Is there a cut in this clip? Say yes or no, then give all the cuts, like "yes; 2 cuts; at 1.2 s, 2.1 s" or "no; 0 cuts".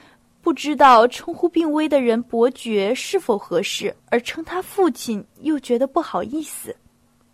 yes; 1 cut; at 4.0 s